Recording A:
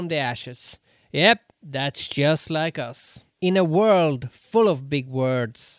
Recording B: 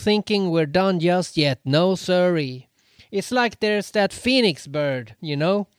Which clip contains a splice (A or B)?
A